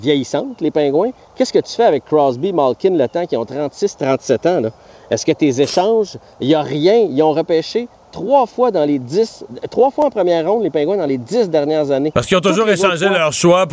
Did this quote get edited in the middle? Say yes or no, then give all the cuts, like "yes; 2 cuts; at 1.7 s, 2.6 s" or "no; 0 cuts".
no; 0 cuts